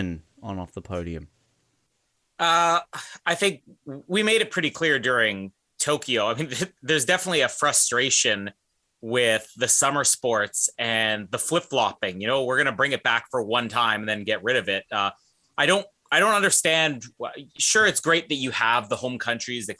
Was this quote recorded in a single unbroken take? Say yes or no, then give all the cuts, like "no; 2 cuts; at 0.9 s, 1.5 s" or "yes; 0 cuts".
yes; 0 cuts